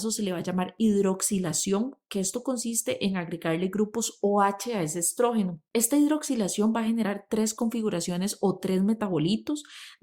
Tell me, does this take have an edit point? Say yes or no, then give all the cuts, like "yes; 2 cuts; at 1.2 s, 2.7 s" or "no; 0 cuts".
yes; 1 cut; at 5.7 s